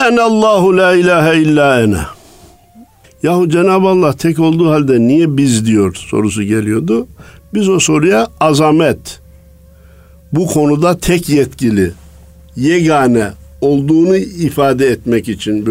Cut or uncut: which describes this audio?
cut